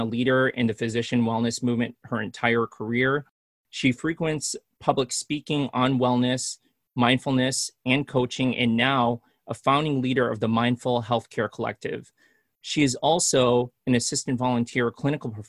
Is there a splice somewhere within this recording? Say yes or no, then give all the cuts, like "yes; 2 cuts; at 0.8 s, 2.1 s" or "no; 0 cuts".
no; 0 cuts